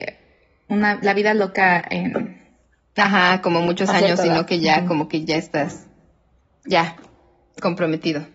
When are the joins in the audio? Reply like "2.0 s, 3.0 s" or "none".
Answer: none

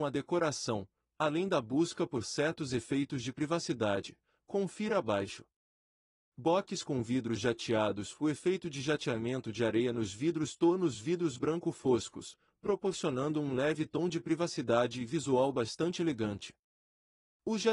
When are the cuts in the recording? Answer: none

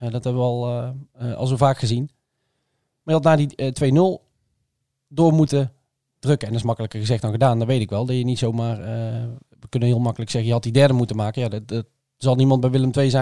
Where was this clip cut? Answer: none

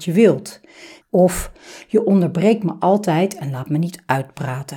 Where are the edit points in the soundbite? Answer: 1.0 s

